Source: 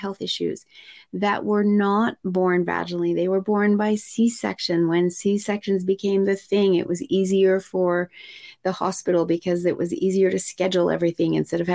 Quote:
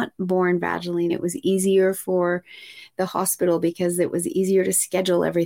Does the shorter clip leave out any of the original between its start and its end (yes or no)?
yes